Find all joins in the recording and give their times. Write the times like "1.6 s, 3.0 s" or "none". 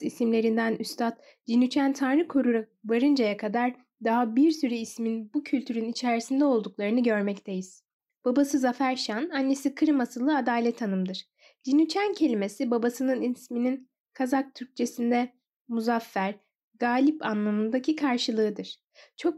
8.1 s